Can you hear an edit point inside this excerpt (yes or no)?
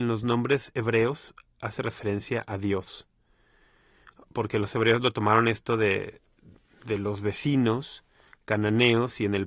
no